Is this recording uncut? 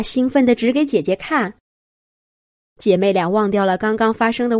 no; 1 cut; at 2.7 s

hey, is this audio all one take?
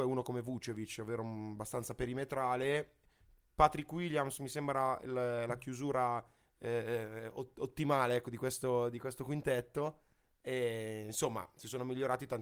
yes; 0 cuts

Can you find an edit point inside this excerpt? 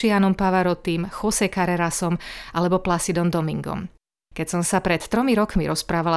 no; 0 cuts

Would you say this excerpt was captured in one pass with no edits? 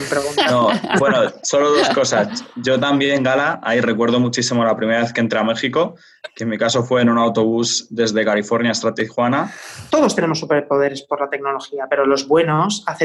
no; 1 cut; at 9.9 s

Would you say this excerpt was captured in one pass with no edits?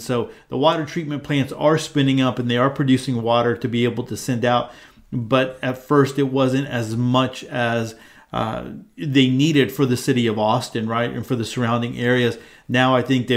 yes; 0 cuts

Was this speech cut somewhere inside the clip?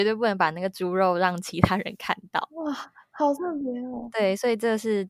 no; 0 cuts

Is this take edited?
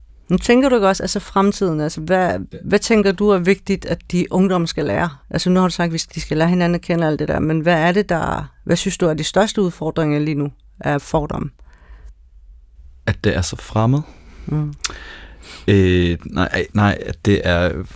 yes; 1 cut; at 5.2 s

